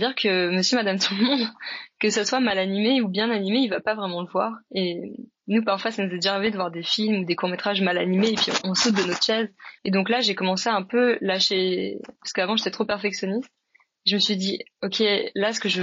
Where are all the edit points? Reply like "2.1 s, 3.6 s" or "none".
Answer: 9.8 s, 12.1 s